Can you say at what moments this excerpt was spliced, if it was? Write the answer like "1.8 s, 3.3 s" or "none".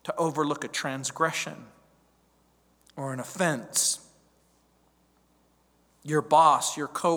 none